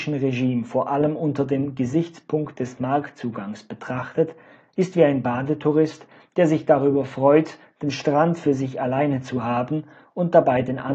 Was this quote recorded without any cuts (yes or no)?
yes